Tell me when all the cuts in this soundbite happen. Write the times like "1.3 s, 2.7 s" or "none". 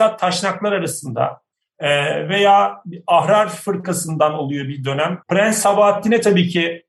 5.2 s